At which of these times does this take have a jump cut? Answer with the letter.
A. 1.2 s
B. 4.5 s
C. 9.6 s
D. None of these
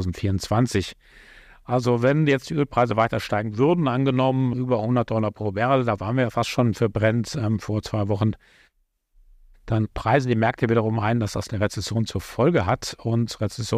B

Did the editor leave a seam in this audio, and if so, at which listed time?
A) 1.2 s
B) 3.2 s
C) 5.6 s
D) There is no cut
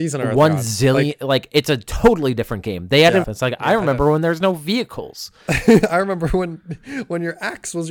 B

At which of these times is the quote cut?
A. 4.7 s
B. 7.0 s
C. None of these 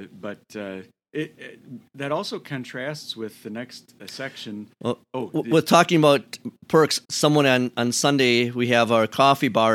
B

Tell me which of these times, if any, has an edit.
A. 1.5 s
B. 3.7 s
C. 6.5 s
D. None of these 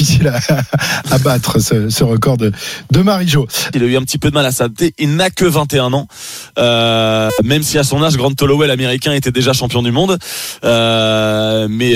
B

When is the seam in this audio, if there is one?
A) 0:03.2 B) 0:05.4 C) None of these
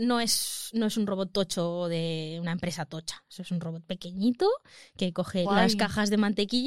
B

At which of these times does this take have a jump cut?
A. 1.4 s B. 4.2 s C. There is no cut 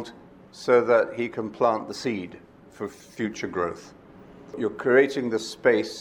C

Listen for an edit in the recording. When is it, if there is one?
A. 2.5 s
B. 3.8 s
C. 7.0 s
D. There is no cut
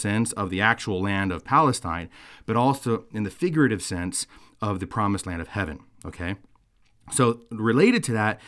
D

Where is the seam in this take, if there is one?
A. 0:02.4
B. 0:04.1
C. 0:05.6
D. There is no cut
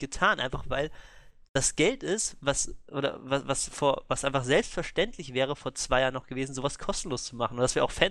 D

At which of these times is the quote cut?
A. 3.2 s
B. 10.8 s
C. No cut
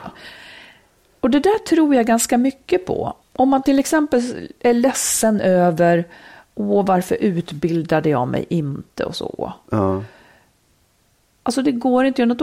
A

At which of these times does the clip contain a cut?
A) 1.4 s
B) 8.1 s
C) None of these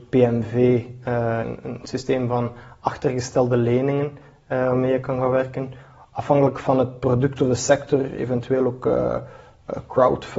A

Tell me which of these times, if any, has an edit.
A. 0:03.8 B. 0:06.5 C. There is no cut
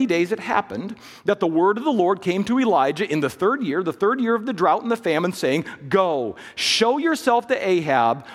C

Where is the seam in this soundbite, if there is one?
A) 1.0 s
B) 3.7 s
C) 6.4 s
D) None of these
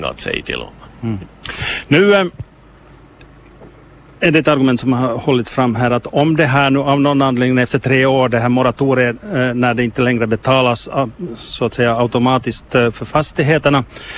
D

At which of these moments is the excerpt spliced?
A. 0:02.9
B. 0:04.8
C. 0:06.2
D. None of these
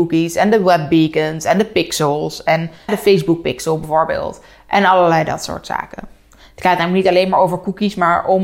A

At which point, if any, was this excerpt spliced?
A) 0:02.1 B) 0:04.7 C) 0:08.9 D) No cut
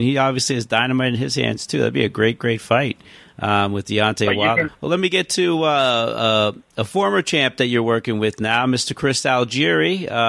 B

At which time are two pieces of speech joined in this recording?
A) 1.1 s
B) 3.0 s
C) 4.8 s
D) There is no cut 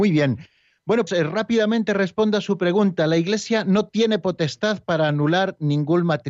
A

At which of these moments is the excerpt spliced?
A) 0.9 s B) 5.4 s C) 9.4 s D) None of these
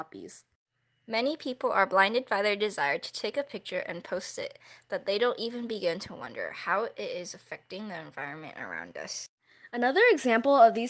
D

